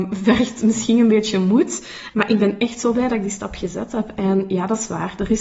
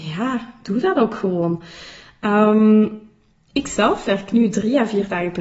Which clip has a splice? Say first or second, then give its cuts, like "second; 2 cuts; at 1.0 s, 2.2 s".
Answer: first; 1 cut; at 2.1 s